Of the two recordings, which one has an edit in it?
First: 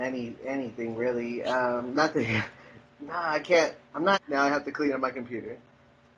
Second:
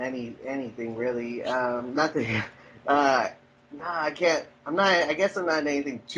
first; 2 cuts; at 2.8 s, 4.1 s

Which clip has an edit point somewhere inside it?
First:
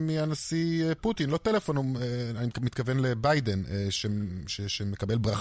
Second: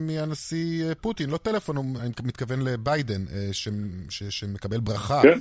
second; 1 cut; at 2.0 s

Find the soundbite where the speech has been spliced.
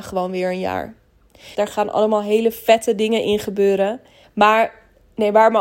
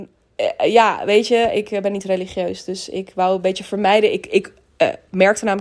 first; 2 cuts; at 1.5 s, 4.2 s

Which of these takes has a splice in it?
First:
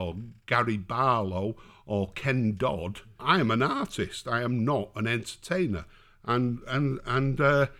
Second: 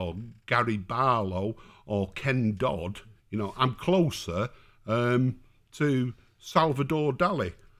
first; 1 cut; at 3.2 s

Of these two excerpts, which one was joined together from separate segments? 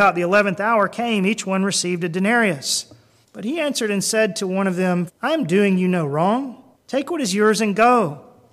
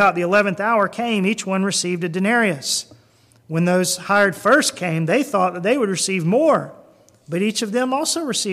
first; 3 cuts; at 3.2 s, 5.1 s, 6.7 s

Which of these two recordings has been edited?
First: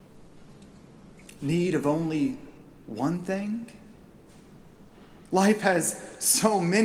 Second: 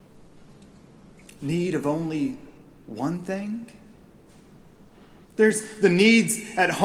second; 1 cut; at 5.2 s

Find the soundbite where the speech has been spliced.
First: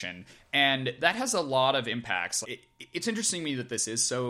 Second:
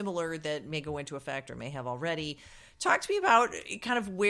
first; 1 cut; at 2.4 s

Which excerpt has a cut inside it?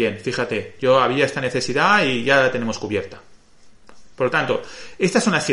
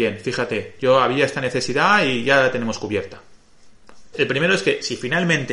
second; 1 cut; at 4.1 s

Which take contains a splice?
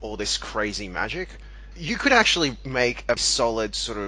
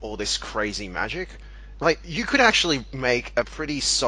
first; 2 cuts; at 1.7 s, 3.2 s

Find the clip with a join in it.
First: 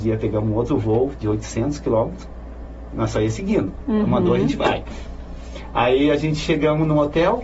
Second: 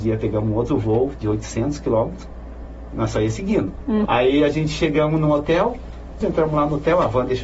second; 2 cuts; at 4.1 s, 6.2 s

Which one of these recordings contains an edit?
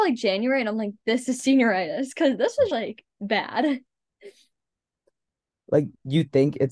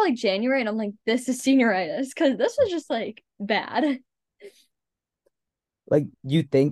first; 1 cut; at 2.7 s

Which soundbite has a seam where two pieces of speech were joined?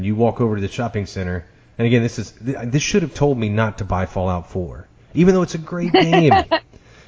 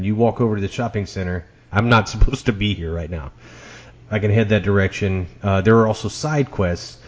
second; 2 cuts; at 1.7 s, 3.9 s

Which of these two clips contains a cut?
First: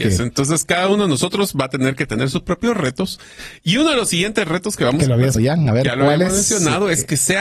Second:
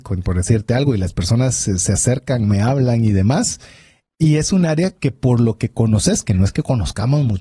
first; 1 cut; at 5.4 s

